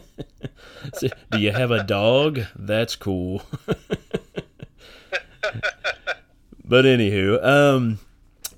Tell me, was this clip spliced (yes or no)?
no